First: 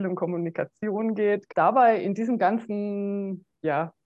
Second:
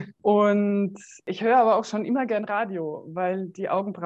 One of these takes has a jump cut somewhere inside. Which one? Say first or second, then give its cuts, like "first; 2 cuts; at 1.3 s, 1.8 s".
first; 1 cut; at 1.5 s